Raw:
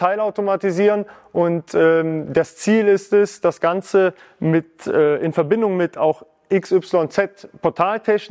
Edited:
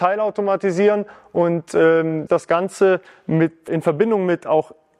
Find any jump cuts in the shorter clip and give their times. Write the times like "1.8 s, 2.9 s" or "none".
2.3 s, 3.7 s